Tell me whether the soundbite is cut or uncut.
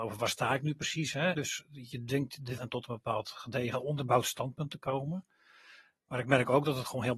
cut